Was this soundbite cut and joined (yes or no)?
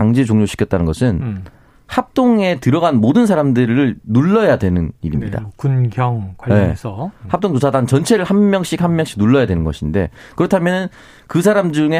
no